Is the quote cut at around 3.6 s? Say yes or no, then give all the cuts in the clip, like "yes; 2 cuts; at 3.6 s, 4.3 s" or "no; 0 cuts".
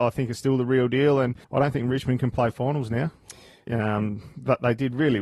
yes; 2 cuts; at 1.4 s, 3.6 s